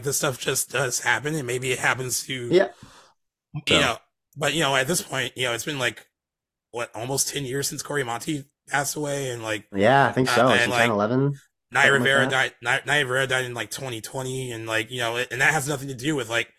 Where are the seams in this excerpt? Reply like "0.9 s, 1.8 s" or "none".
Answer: 3.7 s, 10.7 s